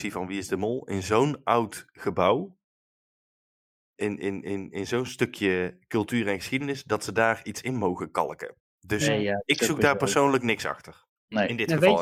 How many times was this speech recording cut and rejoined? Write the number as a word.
zero